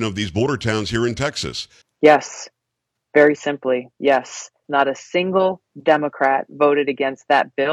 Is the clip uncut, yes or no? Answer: no